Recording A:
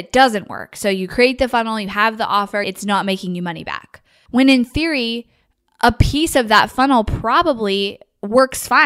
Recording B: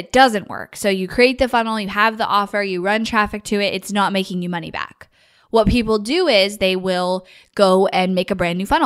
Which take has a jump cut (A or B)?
A